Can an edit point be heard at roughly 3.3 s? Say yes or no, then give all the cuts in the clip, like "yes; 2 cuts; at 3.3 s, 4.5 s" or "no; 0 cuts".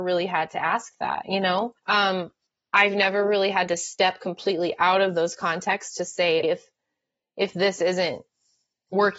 no; 2 cuts; at 1.8 s, 6.4 s